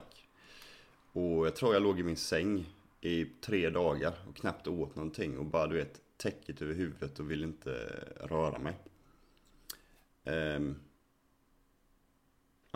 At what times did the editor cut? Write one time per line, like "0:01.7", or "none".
none